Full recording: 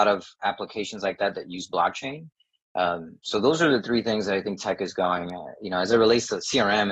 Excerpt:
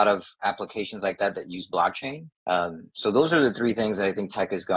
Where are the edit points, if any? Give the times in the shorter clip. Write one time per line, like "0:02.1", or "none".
0:02.4